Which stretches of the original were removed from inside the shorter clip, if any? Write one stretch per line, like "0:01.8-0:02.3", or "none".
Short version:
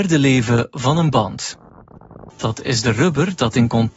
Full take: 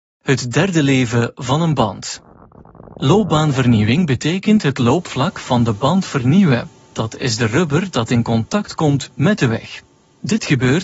0:02.9-0:06.8